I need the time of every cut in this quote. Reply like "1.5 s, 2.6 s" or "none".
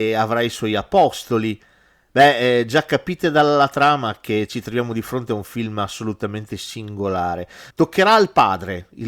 2.1 s, 7.7 s